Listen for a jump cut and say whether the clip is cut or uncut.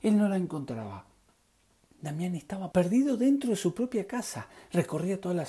cut